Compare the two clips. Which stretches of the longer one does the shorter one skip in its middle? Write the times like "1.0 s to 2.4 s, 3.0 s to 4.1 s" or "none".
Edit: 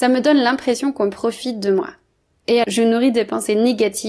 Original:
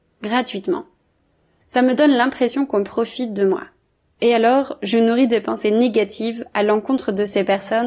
4.4 s to 4.8 s